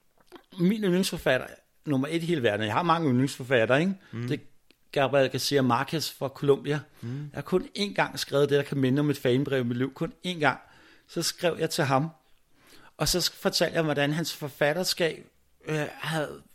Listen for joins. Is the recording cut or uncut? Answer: uncut